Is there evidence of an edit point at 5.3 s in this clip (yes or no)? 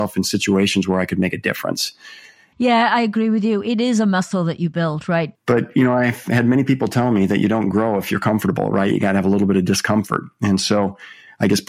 yes